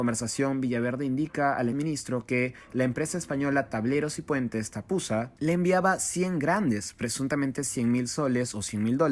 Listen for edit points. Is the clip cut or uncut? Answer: cut